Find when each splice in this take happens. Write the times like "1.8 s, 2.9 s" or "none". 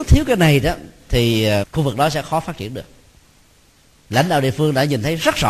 1.6 s